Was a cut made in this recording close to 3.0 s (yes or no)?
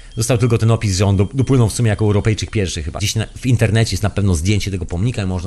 yes